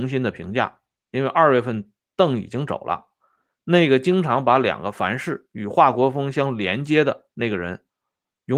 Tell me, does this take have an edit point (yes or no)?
no